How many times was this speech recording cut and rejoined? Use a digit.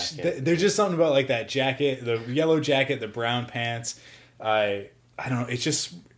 0